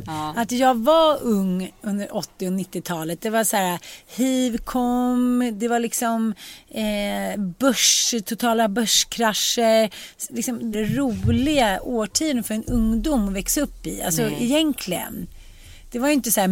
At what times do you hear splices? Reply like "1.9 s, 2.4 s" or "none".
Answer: 10.7 s